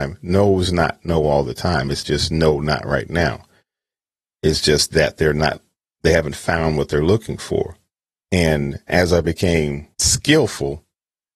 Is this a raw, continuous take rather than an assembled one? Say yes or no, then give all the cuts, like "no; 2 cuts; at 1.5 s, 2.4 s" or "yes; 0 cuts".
no; 2 cuts; at 8.1 s, 9.9 s